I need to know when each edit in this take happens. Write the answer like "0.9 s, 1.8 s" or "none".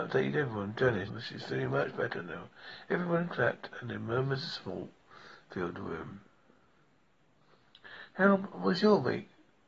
1.1 s